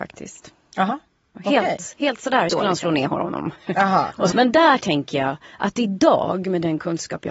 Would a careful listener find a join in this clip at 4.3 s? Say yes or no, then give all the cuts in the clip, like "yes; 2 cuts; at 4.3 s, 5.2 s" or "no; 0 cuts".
yes; 2 cuts; at 2.5 s, 4.3 s